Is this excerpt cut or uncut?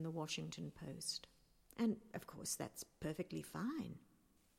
cut